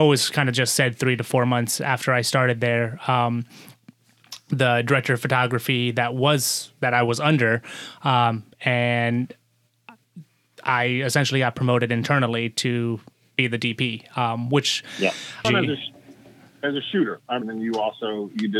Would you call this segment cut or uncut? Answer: cut